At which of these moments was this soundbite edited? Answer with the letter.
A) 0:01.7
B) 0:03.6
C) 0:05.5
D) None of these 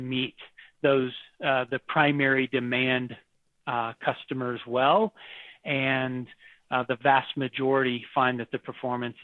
D